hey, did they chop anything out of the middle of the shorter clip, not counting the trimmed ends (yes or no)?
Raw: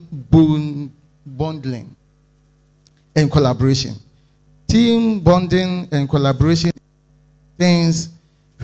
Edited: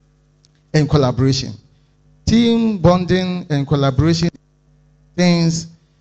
no